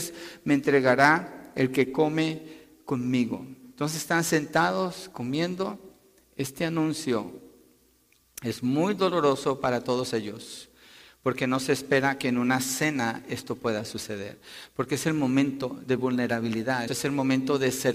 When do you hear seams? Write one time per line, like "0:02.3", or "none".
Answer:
0:16.9